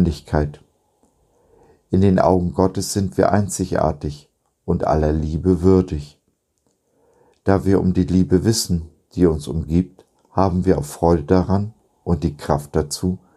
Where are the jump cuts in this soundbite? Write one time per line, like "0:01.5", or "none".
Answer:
none